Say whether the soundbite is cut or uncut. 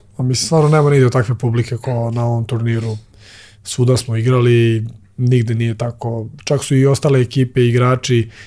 uncut